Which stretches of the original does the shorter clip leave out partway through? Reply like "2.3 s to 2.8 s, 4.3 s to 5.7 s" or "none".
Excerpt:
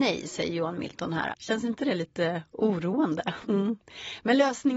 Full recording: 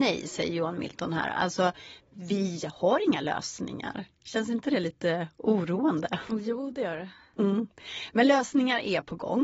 1.3 s to 4.2 s, 6.3 s to 7.3 s